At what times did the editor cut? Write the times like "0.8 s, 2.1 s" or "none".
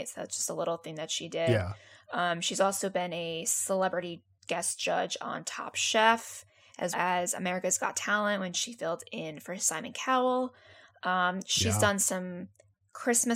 6.9 s